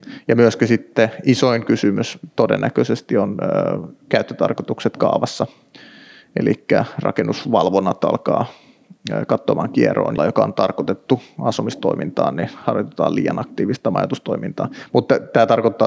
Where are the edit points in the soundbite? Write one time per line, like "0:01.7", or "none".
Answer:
0:10.2